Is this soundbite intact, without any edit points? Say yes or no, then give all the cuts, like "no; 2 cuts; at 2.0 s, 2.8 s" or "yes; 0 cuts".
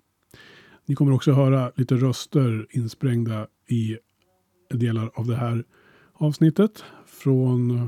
yes; 0 cuts